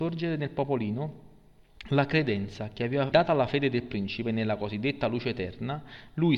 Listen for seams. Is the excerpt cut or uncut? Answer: cut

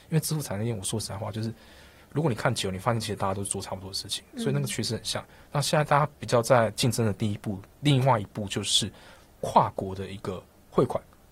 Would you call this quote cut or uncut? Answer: uncut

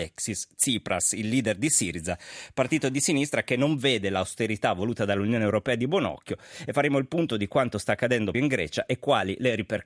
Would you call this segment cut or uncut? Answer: cut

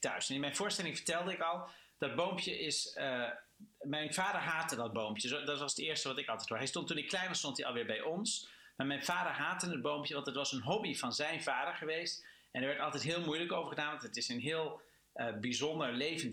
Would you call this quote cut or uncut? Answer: uncut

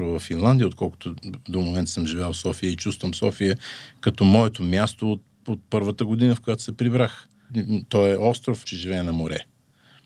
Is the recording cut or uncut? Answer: cut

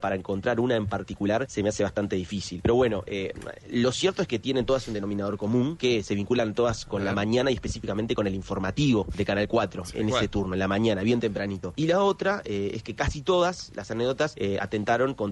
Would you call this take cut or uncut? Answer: cut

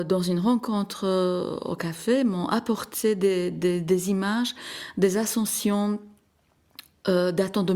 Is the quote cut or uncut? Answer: uncut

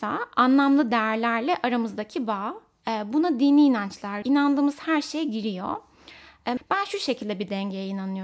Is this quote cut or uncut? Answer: cut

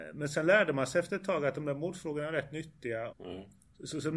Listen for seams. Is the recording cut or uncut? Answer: cut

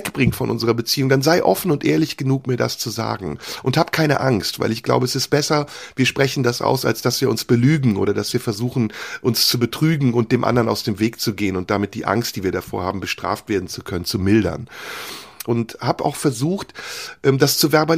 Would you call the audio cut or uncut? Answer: cut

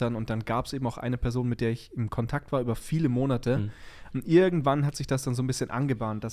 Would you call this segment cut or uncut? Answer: cut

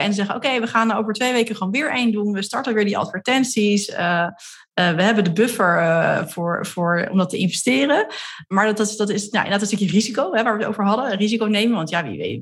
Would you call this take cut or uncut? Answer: uncut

